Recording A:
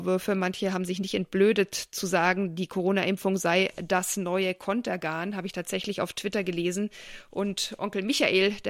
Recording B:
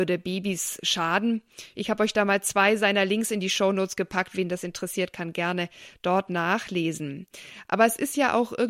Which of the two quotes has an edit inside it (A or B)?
B